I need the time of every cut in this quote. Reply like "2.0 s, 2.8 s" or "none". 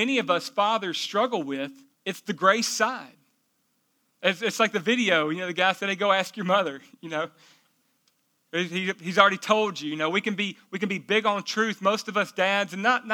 1.9 s